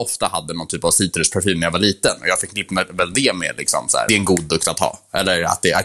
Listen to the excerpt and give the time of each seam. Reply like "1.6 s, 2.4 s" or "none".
4.1 s